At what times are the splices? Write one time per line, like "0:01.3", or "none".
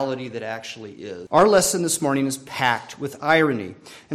0:01.3